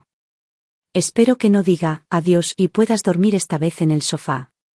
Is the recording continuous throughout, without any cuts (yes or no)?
no